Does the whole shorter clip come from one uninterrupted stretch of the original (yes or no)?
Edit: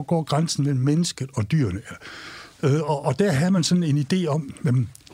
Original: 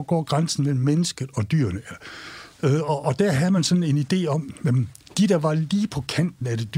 yes